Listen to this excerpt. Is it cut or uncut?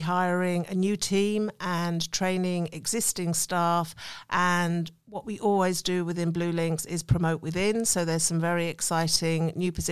uncut